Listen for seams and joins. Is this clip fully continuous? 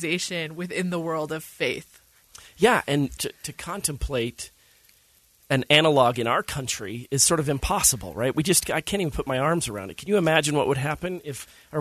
no; 1 cut; at 3.2 s

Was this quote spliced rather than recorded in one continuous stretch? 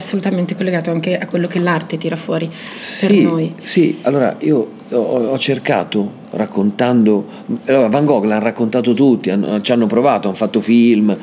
no; 0 cuts

